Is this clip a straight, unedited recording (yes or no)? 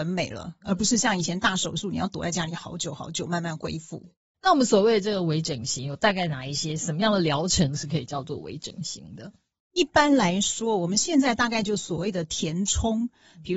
yes